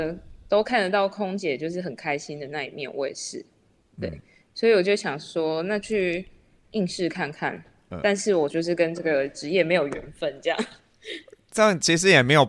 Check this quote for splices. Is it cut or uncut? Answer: uncut